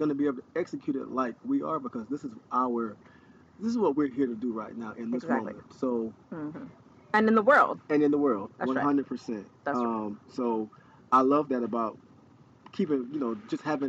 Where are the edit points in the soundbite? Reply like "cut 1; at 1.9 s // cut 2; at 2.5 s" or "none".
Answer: none